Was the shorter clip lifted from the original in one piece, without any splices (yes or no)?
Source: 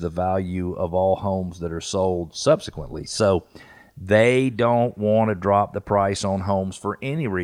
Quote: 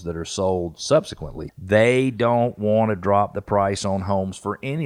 no